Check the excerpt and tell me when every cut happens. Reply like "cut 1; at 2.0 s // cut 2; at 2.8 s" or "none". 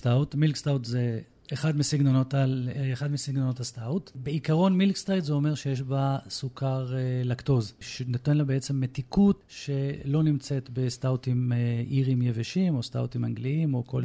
none